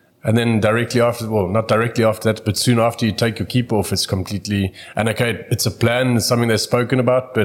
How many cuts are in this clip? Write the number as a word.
zero